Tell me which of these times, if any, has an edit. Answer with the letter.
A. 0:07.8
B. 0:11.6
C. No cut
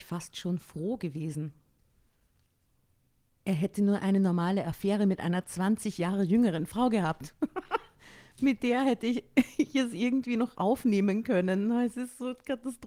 C